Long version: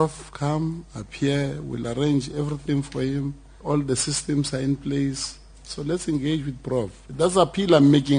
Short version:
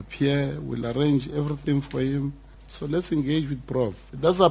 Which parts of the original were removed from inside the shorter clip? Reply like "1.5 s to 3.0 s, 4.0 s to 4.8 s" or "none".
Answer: 3.6 s to 5.5 s